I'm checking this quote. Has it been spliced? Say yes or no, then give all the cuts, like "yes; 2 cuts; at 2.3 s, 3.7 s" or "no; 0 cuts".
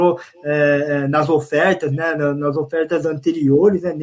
no; 0 cuts